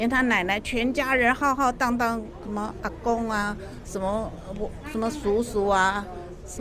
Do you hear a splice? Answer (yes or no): no